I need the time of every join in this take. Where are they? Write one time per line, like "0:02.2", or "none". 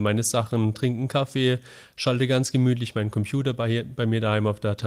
none